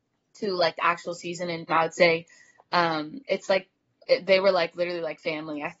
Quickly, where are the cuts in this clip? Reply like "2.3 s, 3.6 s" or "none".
1.7 s